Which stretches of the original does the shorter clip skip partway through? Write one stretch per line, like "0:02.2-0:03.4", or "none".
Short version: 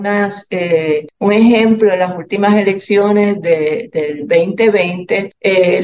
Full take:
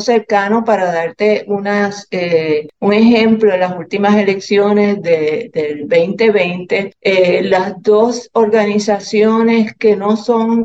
none